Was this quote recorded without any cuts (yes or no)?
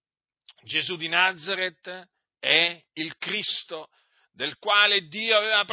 yes